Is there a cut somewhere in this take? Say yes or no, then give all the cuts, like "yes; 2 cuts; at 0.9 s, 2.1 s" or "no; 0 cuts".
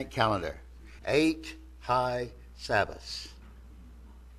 yes; 1 cut; at 1.0 s